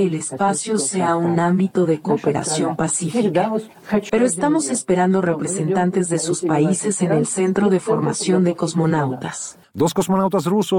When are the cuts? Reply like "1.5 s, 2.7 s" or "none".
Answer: 4.1 s, 9.6 s

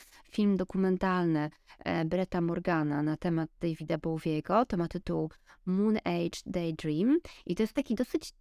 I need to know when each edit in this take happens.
none

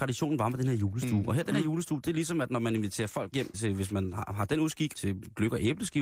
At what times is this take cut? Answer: 3.5 s, 4.9 s

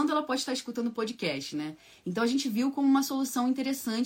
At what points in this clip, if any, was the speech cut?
none

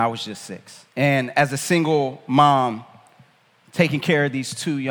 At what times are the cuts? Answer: 0.9 s

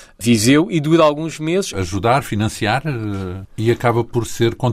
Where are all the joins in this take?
1.7 s, 3.5 s

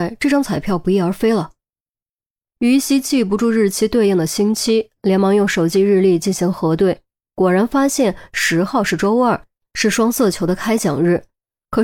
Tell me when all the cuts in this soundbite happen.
none

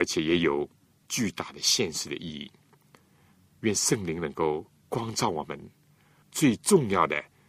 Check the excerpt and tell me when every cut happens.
6.2 s

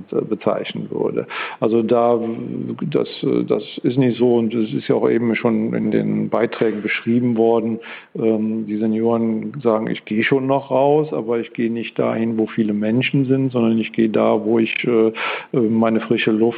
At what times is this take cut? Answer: none

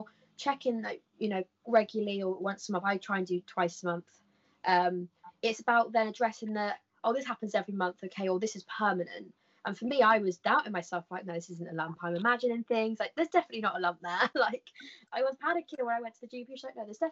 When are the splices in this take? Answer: none

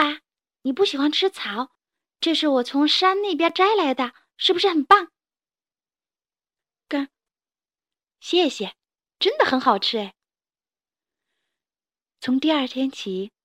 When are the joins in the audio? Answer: 7.3 s, 9.0 s

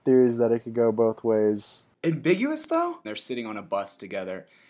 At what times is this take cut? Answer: 3.0 s

